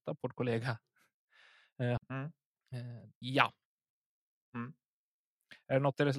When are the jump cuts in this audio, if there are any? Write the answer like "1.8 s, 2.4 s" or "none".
2.0 s, 3.2 s